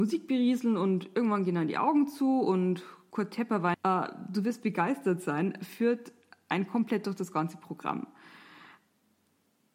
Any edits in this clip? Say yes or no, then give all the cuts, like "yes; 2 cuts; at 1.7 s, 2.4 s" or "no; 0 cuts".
yes; 1 cut; at 3.7 s